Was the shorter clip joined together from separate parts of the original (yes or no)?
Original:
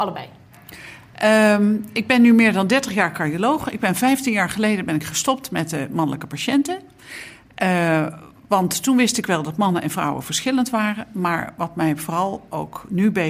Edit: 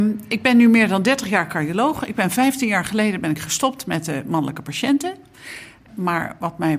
yes